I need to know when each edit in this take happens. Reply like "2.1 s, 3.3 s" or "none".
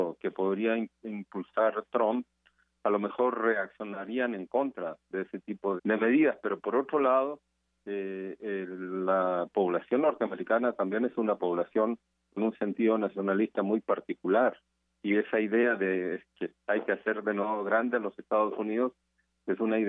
5.8 s